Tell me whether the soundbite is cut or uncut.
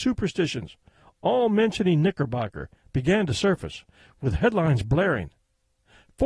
uncut